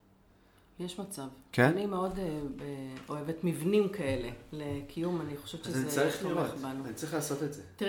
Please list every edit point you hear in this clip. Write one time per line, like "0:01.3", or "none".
none